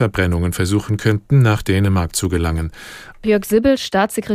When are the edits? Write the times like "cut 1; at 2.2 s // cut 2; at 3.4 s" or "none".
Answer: cut 1; at 3.1 s